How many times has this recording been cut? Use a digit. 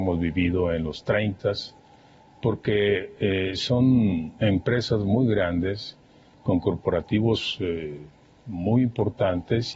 0